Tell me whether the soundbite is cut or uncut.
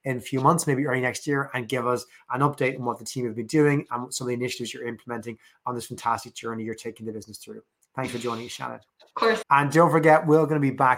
cut